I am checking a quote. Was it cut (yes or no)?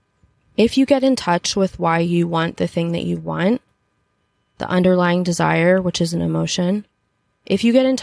no